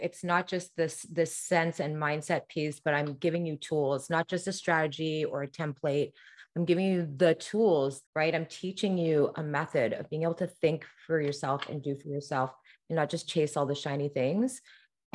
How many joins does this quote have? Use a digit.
1